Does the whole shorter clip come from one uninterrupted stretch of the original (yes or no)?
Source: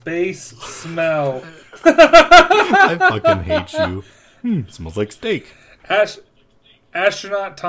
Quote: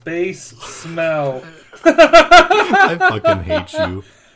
yes